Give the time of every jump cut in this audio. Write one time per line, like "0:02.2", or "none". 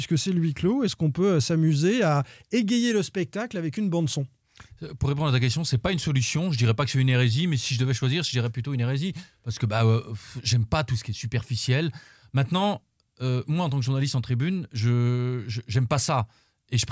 none

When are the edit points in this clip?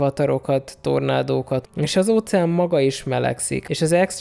0:01.6

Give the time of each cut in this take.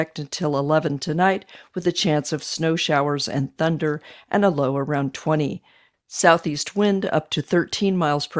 0:05.9

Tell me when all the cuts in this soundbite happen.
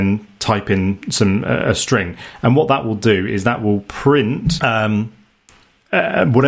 0:04.6

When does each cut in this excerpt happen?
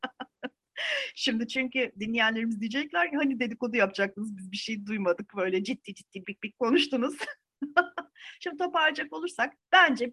0:06.2

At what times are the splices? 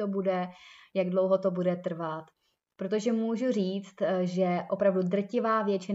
0:02.7

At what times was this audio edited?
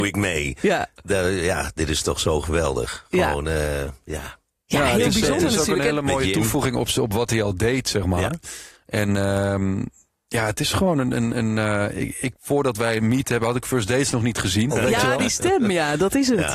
0:12.4
0:14.7

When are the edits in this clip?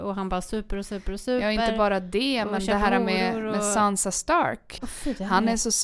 0:04.8

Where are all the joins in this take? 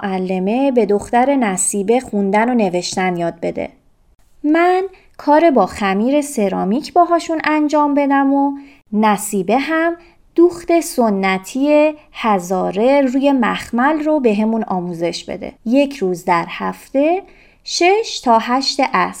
0:15.6

